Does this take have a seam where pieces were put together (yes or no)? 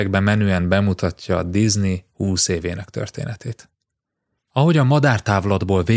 yes